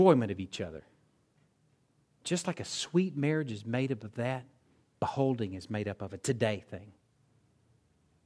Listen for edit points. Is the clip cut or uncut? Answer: uncut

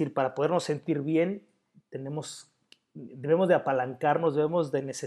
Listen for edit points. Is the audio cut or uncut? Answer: cut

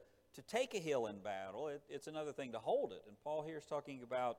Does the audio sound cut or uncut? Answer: uncut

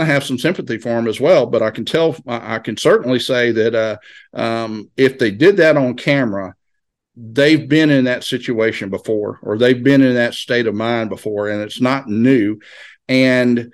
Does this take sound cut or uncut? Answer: uncut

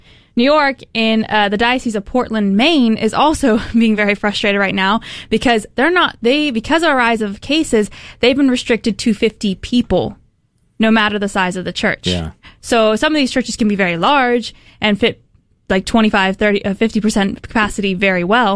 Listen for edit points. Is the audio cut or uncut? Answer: uncut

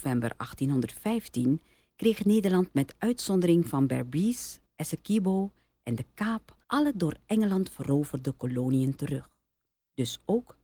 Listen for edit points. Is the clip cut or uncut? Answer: cut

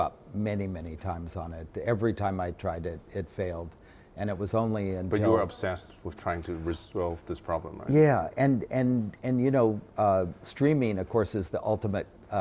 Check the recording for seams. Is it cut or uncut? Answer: uncut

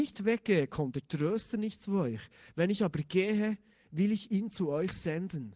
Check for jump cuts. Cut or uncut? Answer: uncut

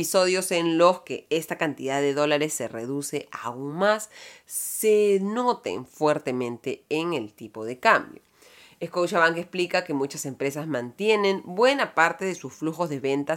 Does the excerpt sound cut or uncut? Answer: uncut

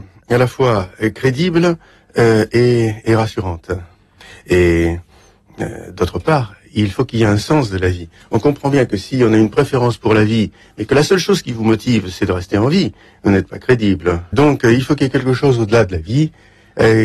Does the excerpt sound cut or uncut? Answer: cut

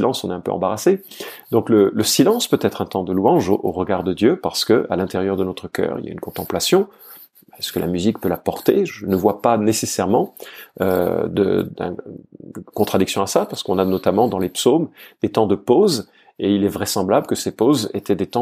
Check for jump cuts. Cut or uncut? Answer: cut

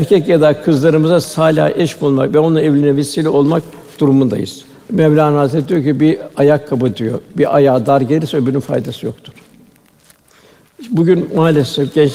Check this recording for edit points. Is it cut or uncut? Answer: cut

